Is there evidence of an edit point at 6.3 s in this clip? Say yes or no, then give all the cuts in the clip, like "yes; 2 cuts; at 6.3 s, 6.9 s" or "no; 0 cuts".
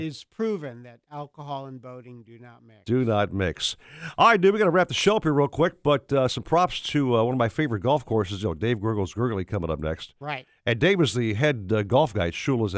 no; 0 cuts